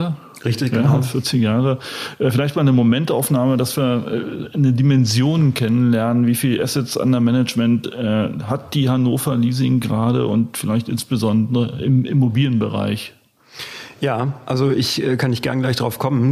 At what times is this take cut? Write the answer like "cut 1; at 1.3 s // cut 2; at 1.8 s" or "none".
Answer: none